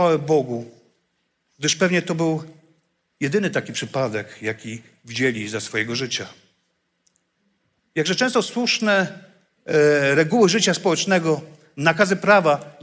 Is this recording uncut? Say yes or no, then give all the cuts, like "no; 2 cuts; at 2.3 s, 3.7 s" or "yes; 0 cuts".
no; 1 cut; at 7.8 s